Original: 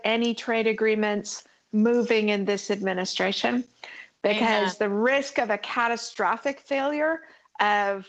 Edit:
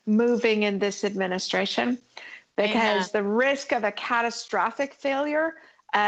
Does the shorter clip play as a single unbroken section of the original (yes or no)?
yes